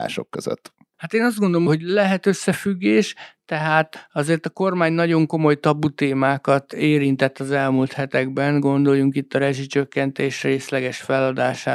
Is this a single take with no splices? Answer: yes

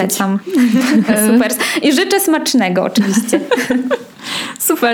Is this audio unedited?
yes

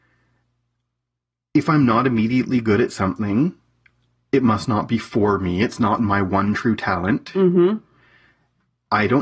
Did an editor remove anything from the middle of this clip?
no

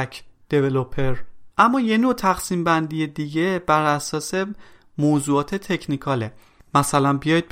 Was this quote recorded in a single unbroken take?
no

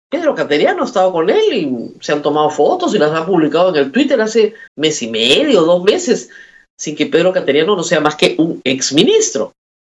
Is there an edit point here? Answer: yes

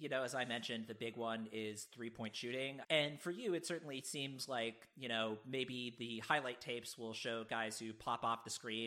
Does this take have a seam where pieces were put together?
yes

